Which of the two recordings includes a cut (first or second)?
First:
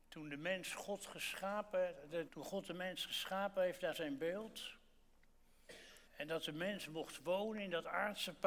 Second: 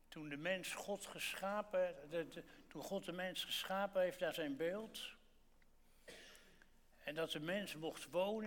first